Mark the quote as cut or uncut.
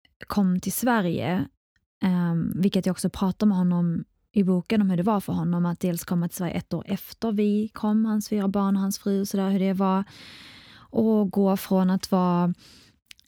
uncut